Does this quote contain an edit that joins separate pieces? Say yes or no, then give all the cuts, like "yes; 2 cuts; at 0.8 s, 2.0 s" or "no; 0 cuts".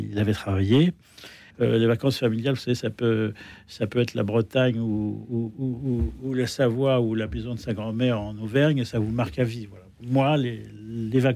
yes; 1 cut; at 1.5 s